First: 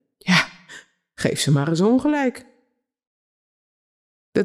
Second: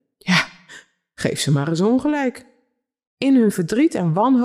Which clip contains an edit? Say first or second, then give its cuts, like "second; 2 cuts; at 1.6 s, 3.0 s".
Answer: second; 1 cut; at 3.1 s